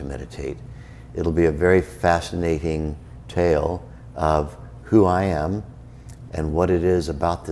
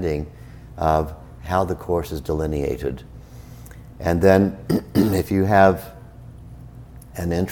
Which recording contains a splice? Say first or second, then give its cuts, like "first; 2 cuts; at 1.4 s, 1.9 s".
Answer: first; 2 cuts; at 1.1 s, 6.3 s